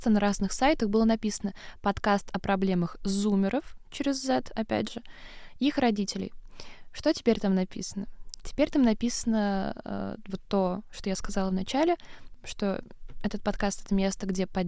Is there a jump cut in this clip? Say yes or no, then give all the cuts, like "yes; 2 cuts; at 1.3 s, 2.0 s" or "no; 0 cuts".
no; 0 cuts